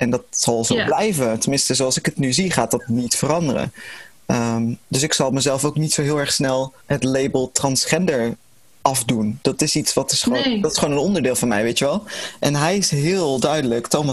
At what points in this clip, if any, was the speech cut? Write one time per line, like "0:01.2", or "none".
0:06.8